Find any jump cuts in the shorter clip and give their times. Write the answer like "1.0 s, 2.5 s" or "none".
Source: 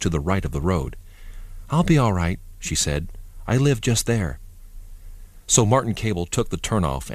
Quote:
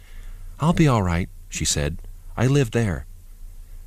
2.7 s

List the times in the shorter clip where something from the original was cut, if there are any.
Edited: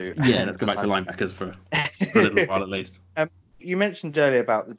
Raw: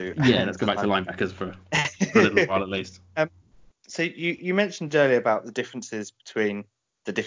3.6 s

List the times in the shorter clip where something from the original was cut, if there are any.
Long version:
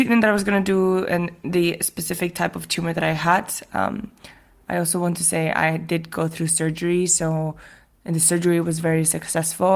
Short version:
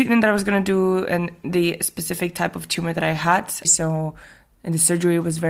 3.6 s

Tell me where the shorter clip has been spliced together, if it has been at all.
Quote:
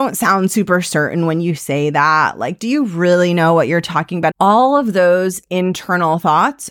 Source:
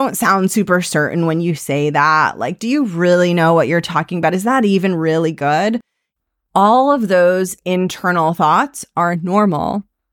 4.3 s

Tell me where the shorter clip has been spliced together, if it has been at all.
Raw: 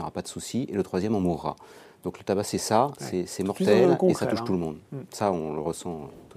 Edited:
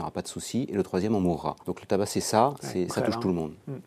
1.6 s, 2.9 s

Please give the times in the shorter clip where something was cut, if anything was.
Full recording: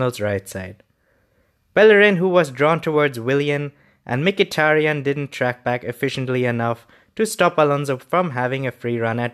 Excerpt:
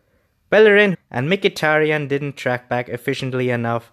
0.9 s

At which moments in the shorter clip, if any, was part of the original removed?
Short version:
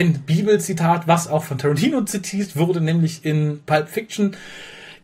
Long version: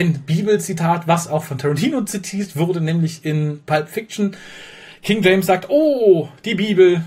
none

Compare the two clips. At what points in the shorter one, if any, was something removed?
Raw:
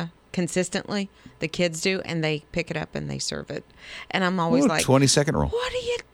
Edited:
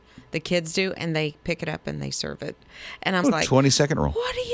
3.2 s

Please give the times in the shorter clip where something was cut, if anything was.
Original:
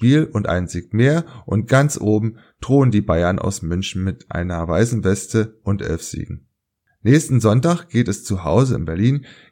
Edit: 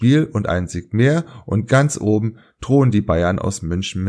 none

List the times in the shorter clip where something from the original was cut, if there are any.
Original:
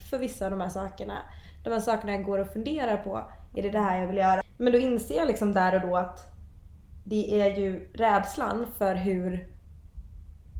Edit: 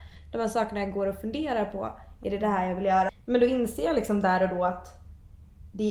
none

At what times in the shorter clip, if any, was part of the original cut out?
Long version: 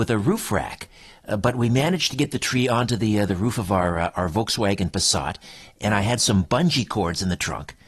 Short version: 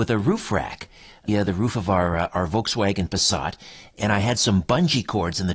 1.3 s

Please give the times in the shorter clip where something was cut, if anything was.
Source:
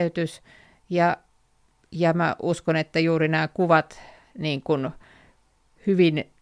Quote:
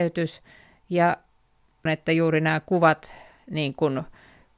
1.9 s

